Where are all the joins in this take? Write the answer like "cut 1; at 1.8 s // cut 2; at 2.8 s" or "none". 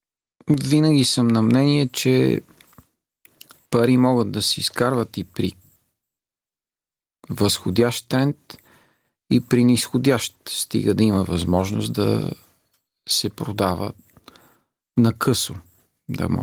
none